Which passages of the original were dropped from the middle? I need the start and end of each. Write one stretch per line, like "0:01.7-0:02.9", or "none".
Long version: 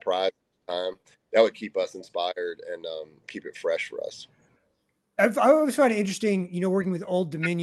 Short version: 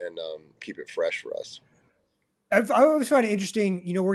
none